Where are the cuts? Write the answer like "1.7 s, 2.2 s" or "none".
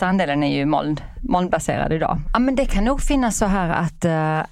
2.3 s